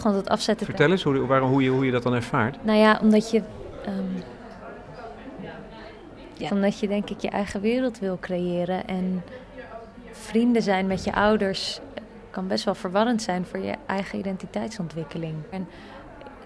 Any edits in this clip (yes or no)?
yes